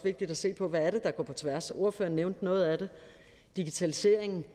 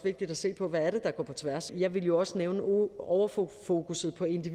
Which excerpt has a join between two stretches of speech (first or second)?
second